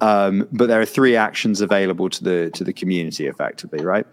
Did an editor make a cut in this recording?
no; 0 cuts

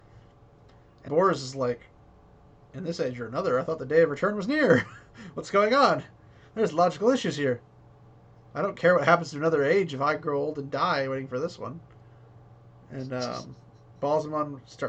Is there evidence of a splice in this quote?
yes; 1 cut; at 1.1 s

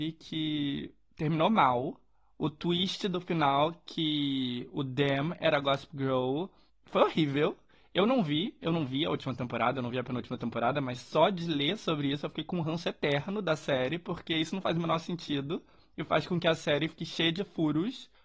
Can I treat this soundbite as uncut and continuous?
yes; 0 cuts

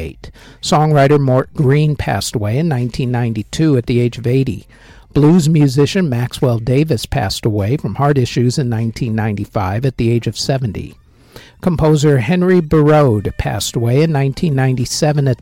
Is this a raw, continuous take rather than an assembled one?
yes; 0 cuts

